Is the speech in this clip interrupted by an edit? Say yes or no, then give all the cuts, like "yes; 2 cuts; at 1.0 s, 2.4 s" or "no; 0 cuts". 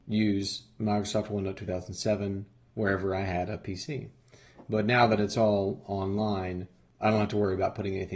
no; 0 cuts